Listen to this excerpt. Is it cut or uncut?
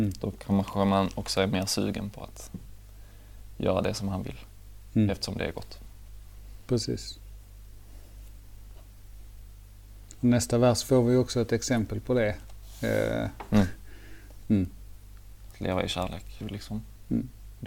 cut